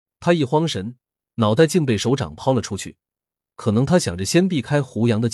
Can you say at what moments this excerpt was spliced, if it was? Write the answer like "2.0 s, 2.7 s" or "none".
1.2 s